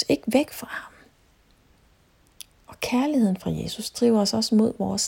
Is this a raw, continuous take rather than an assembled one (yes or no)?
yes